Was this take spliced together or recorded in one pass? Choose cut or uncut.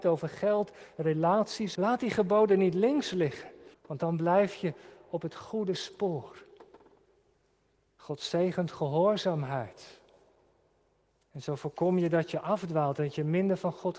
cut